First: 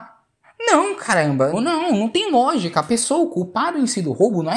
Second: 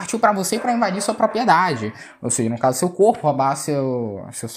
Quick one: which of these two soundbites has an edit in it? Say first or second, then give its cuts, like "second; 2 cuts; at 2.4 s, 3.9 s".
first; 1 cut; at 1.5 s